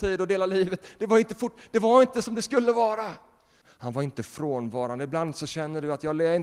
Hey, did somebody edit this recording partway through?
yes; 1 cut; at 3.6 s

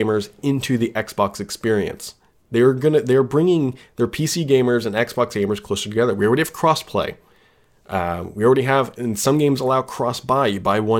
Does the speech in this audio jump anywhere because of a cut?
no; 0 cuts

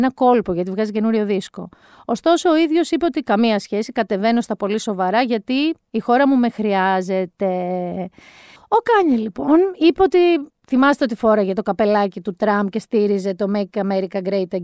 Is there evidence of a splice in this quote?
no; 0 cuts

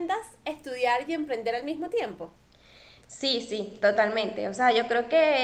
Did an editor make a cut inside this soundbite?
no; 0 cuts

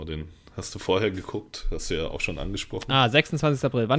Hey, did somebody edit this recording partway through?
no; 0 cuts

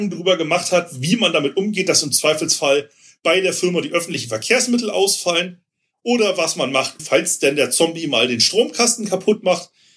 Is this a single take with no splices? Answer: no; 1 cut; at 7.0 s

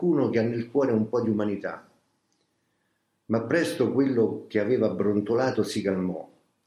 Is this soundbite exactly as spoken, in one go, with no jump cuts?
yes; 0 cuts

